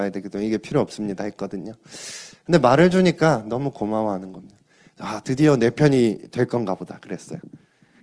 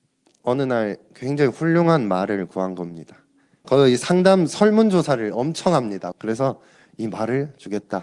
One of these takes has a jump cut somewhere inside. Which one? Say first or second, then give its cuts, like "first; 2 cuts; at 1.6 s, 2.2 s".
second; 2 cuts; at 3.6 s, 6.1 s